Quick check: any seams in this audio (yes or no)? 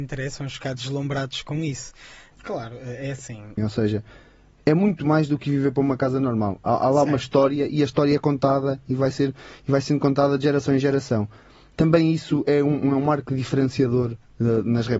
yes